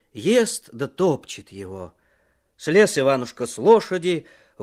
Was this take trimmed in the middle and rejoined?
no; 0 cuts

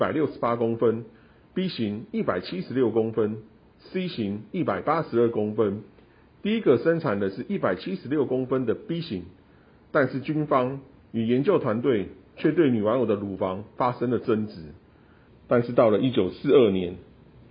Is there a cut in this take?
yes; 1 cut; at 15.3 s

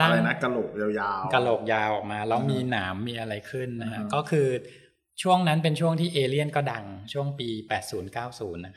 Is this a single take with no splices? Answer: yes; 0 cuts

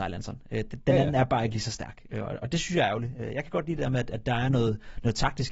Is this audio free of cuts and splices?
yes; 0 cuts

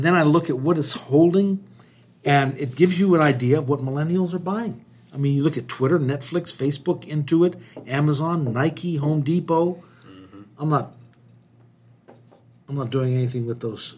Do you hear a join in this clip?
no; 0 cuts

